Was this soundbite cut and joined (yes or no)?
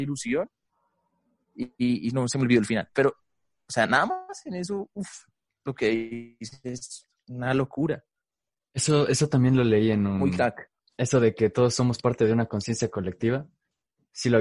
no